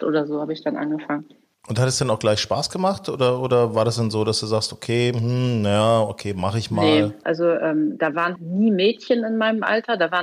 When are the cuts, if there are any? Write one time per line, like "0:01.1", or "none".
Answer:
0:07.2
0:08.4